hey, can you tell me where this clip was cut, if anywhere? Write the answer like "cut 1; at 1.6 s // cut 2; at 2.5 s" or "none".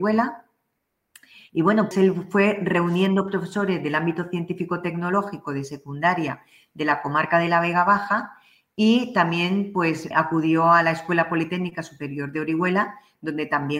cut 1; at 1.9 s // cut 2; at 10.1 s